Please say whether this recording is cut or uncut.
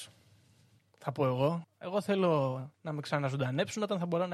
cut